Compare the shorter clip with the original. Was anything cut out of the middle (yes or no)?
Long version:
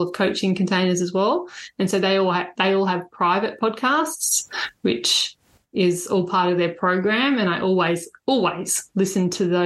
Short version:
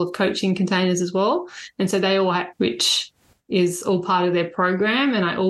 yes